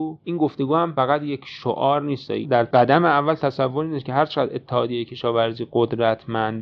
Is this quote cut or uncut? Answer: cut